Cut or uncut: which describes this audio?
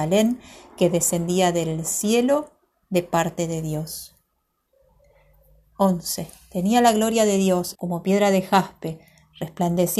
cut